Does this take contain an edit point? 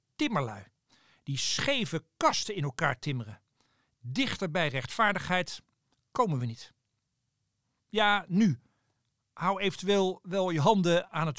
yes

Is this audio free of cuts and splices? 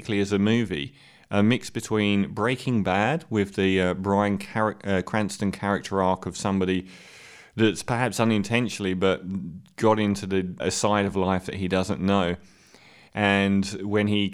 no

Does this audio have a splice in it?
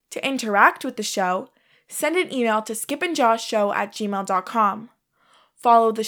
no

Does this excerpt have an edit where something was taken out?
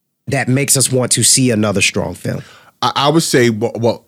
no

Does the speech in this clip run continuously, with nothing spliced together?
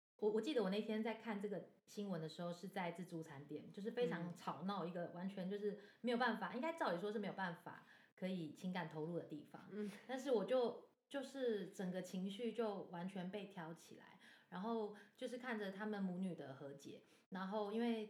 yes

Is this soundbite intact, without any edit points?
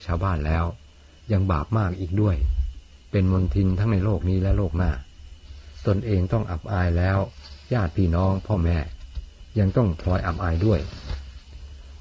yes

